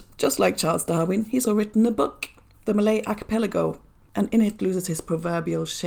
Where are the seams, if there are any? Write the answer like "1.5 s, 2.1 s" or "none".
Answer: 1.5 s, 4.6 s